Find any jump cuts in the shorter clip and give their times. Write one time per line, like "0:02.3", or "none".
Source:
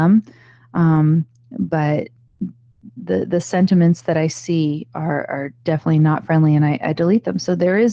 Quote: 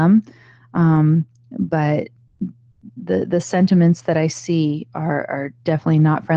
none